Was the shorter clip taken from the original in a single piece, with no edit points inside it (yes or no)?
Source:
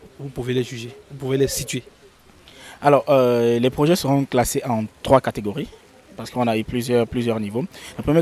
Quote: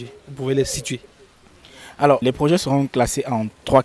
no